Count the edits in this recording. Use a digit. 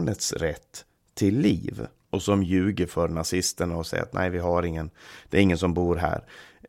1